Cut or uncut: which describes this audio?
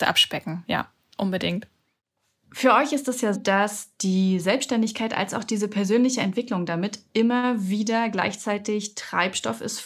cut